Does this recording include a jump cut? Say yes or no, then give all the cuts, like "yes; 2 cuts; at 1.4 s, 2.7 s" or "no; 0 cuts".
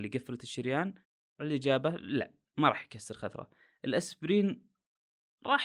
no; 0 cuts